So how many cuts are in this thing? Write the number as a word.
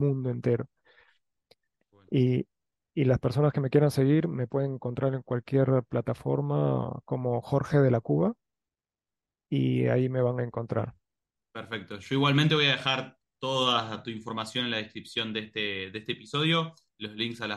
zero